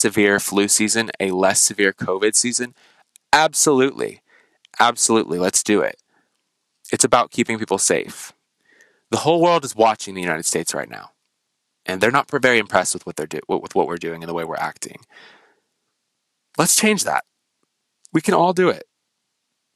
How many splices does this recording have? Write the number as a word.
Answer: zero